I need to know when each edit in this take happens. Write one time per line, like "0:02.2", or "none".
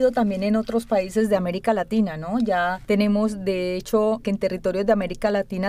0:04.2

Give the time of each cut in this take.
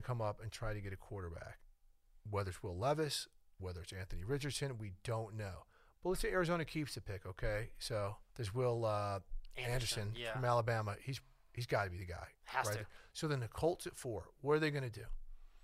0:08.3

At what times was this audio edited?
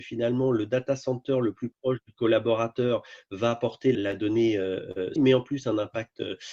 0:03.9
0:05.2

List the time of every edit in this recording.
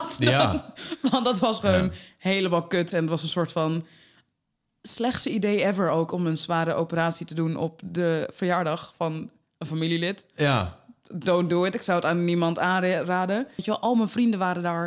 0:02.9
0:13.6

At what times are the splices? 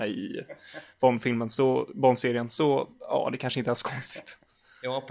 none

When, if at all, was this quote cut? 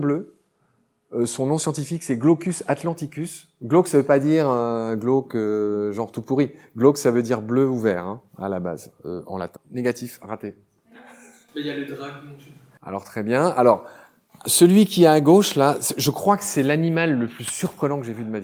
0:09.6

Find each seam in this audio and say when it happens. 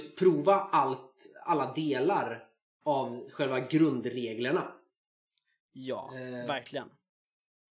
none

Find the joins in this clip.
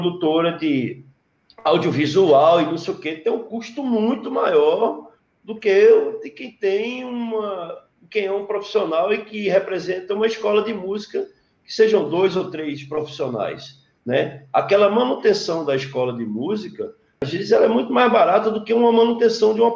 none

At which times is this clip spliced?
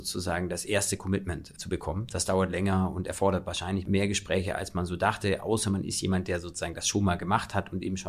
none

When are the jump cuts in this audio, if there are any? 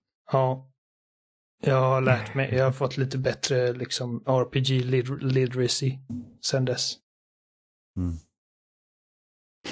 none

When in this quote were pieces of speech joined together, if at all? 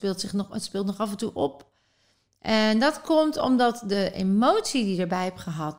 none

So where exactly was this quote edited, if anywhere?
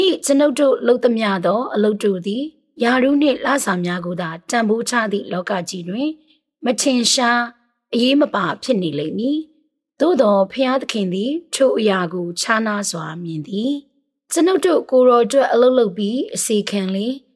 none

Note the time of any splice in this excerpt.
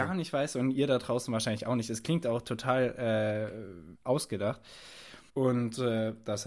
0:04.0
0:05.3

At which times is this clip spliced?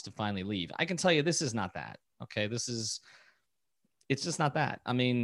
none

